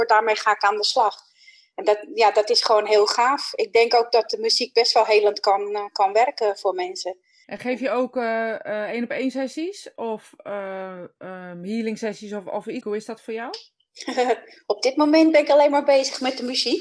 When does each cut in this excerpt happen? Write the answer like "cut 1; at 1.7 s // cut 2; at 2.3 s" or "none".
cut 1; at 7.4 s // cut 2; at 12.8 s